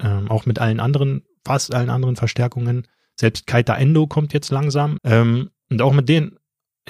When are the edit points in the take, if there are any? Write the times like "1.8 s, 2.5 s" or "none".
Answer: 5.0 s